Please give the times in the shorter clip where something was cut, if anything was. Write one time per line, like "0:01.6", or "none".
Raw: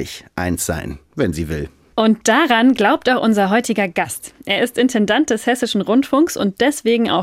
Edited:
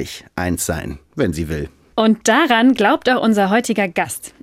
none